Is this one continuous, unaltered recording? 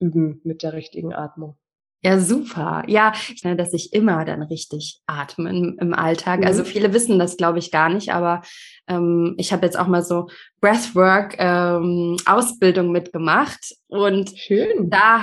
no; 1 cut; at 3.4 s

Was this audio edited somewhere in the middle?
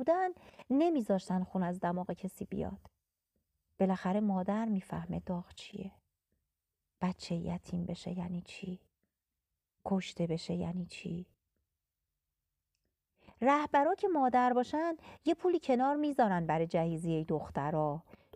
no; 0 cuts

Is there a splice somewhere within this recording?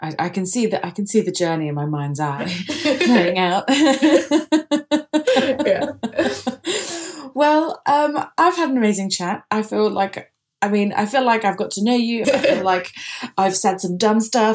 yes; 1 cut; at 12.2 s

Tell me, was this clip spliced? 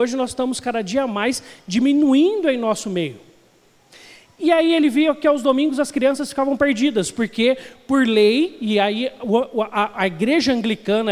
no; 0 cuts

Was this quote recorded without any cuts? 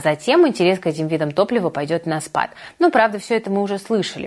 yes; 0 cuts

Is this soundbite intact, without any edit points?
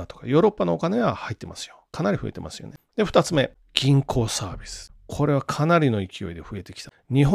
yes; 0 cuts

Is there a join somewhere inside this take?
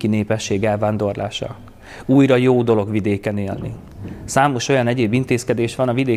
no; 0 cuts

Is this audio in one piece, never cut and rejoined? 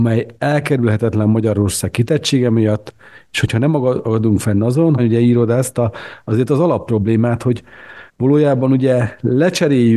no; 2 cuts; at 5.0 s, 8.1 s

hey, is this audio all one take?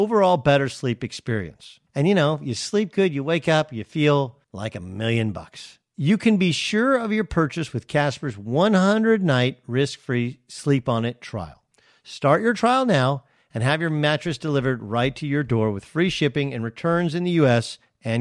yes; 0 cuts

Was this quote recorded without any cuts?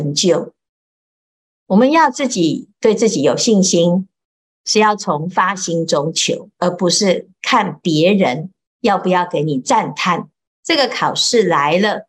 no; 1 cut; at 10.5 s

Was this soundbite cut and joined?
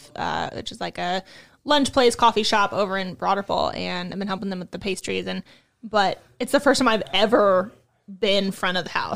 no; 0 cuts

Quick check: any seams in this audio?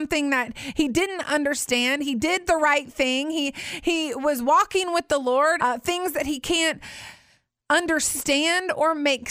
yes; 1 cut; at 5.6 s

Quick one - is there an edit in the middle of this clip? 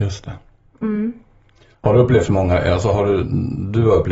no; 0 cuts

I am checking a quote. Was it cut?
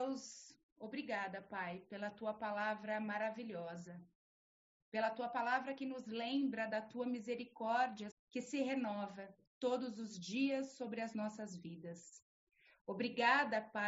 yes; 1 cut; at 8.1 s

